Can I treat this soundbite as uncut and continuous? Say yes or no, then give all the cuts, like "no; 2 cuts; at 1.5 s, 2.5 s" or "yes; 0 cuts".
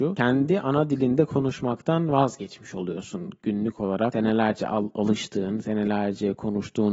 yes; 0 cuts